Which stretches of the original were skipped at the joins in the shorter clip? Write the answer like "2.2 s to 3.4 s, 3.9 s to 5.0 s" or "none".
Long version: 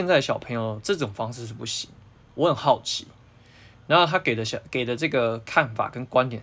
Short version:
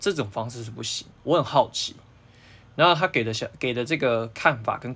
1.9 s to 2.2 s